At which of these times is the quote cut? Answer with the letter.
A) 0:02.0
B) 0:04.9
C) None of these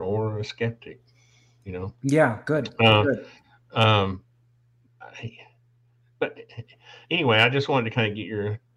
B